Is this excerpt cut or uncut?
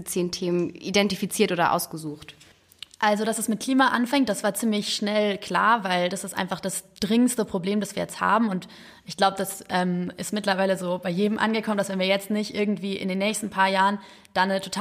uncut